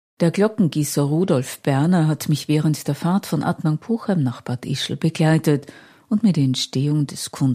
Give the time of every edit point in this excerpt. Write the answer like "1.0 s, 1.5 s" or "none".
none